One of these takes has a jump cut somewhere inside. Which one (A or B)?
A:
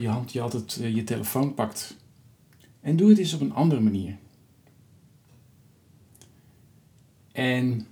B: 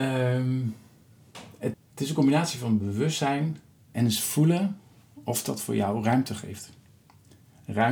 B